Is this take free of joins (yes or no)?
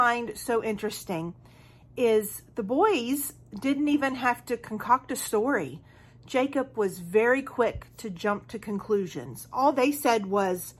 yes